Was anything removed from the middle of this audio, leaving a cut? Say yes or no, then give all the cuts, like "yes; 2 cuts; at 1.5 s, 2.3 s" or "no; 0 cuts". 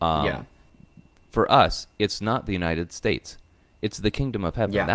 no; 0 cuts